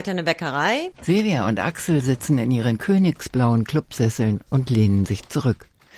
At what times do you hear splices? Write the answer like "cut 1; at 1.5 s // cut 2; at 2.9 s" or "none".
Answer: cut 1; at 0.9 s